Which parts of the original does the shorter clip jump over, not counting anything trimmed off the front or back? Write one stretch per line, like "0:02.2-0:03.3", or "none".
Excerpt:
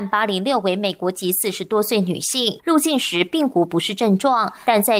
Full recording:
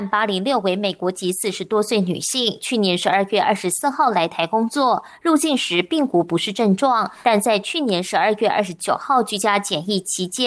0:02.6-0:05.2